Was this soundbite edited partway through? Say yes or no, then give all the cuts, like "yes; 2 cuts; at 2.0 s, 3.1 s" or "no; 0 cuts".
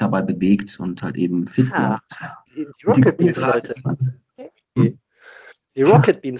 yes; 1 cut; at 2.5 s